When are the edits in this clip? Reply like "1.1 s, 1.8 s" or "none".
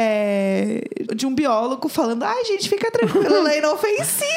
1.1 s